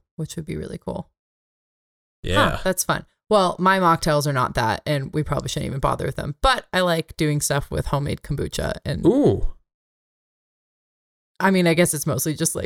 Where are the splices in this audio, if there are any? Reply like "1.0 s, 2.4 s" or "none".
none